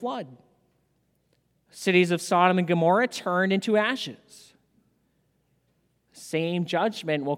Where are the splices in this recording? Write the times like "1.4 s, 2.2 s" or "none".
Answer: none